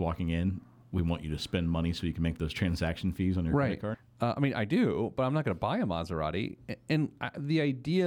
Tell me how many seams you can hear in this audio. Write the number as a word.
one